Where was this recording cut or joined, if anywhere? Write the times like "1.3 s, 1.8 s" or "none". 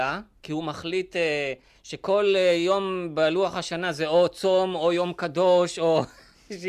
none